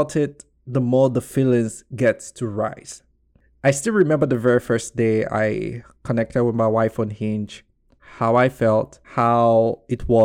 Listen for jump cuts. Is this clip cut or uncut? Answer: cut